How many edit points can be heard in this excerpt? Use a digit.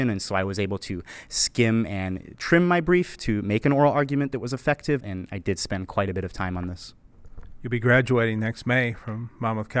1